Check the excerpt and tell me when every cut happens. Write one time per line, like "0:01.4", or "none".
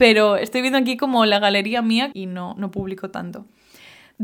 0:02.1